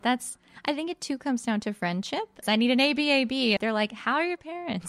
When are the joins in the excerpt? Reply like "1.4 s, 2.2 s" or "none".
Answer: 2.4 s, 3.6 s